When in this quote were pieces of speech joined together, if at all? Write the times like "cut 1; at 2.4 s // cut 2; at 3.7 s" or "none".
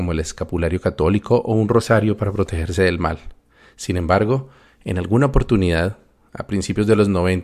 none